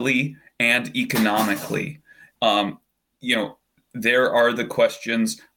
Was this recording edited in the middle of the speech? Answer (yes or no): yes